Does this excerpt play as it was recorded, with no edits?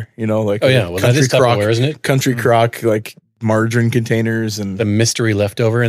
yes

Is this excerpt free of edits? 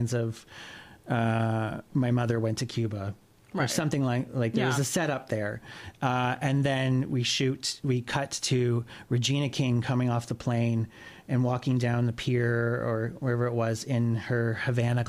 yes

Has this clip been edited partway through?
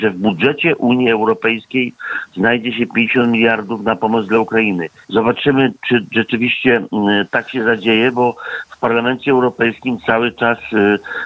yes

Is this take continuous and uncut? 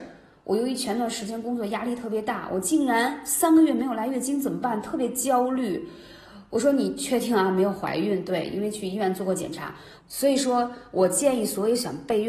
no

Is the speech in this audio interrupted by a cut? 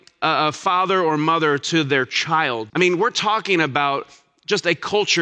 yes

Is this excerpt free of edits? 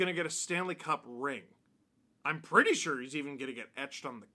yes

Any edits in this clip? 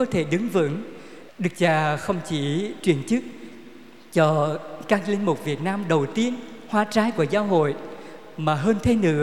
yes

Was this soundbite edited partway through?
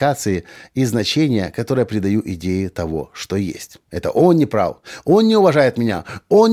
yes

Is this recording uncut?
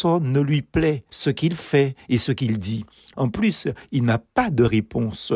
no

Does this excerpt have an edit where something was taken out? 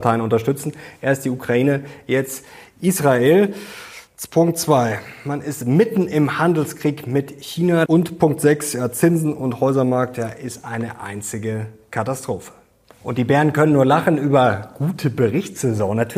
yes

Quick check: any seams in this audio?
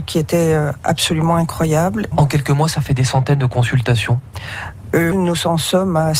yes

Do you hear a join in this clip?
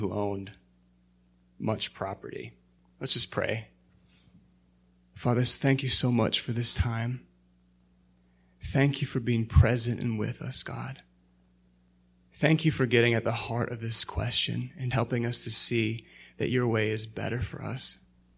yes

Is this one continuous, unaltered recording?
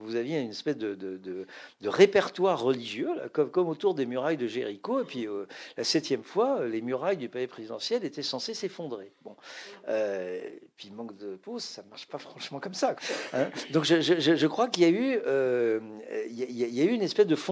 no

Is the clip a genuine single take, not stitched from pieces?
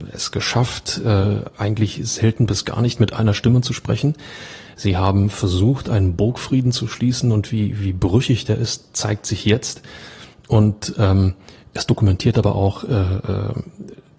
yes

